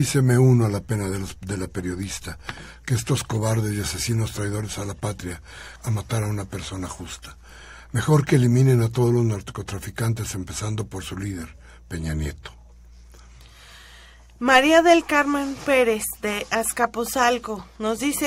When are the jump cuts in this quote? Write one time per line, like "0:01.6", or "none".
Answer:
0:05.8